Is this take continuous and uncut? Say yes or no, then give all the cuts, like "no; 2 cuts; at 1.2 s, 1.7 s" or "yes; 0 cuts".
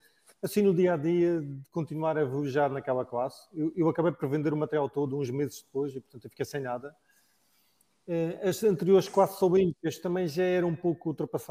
yes; 0 cuts